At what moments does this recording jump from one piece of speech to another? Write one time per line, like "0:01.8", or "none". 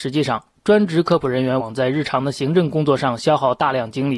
0:01.6